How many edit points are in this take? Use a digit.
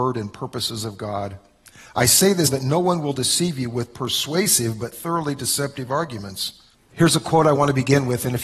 2